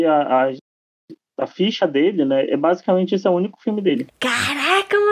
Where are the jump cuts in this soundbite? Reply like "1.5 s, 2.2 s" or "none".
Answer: 4.1 s

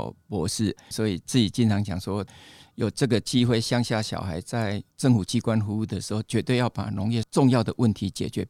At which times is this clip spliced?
0.9 s

